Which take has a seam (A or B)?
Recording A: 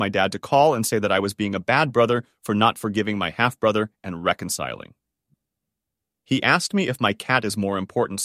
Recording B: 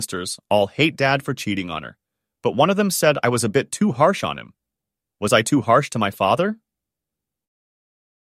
A